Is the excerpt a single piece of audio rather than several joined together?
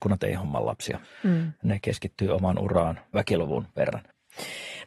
no; 2 cuts; at 1.0 s, 3.1 s

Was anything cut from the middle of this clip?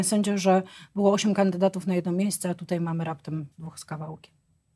yes; 1 cut; at 3.5 s

